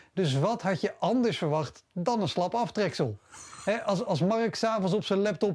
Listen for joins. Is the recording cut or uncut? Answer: uncut